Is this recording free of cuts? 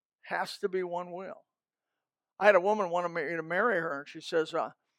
yes; 0 cuts

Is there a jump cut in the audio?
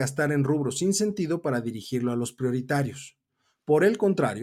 no; 0 cuts

